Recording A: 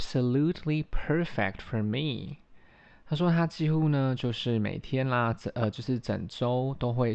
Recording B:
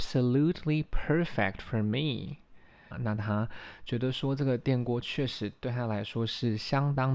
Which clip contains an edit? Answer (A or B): B